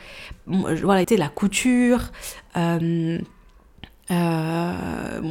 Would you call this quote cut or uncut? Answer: cut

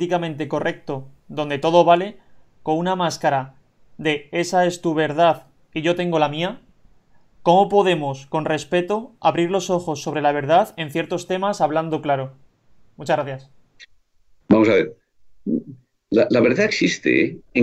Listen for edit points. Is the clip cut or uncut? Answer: uncut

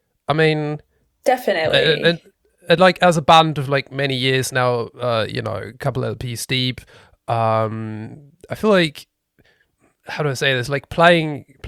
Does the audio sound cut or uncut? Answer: uncut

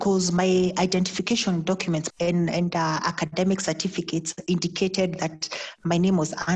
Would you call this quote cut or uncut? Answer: cut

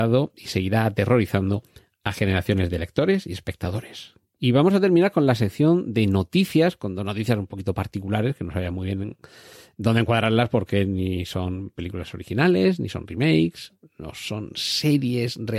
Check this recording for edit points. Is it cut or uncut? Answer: cut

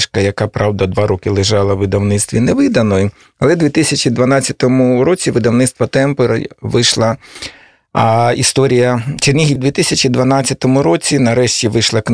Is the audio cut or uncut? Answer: cut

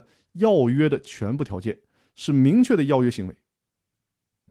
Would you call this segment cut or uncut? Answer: uncut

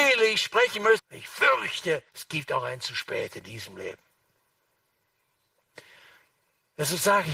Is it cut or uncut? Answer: cut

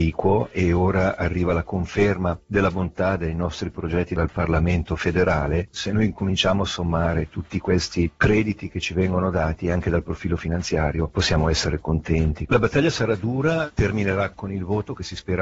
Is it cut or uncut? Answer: cut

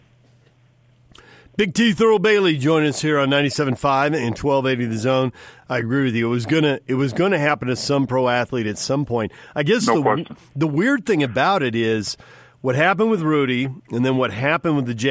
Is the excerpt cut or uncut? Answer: uncut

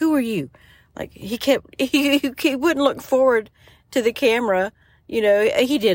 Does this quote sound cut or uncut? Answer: uncut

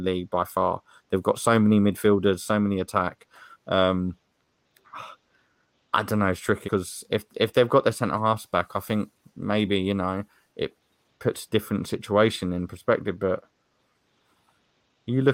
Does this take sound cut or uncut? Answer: cut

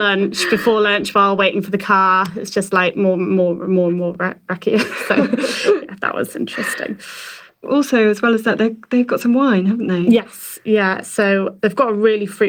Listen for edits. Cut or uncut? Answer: cut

